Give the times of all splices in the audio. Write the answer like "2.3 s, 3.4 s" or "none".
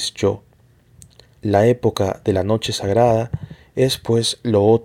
none